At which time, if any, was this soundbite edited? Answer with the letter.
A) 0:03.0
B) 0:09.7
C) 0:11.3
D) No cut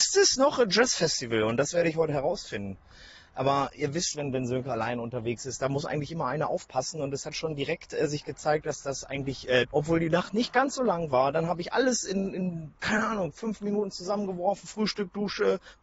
B